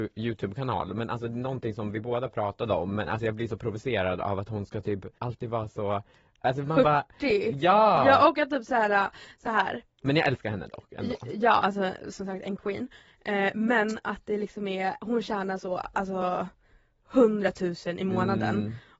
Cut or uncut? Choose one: cut